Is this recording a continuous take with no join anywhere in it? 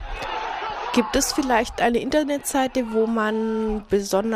yes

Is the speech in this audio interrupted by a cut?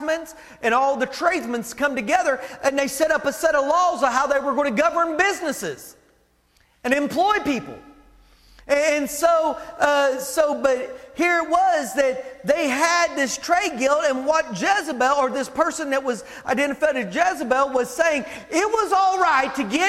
no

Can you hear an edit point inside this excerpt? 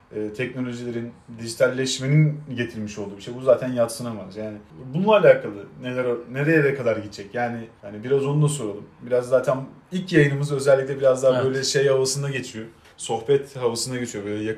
no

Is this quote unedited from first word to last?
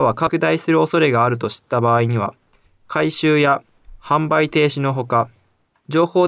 no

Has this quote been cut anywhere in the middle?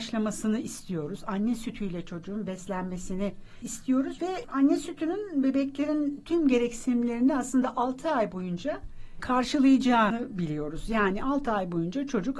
yes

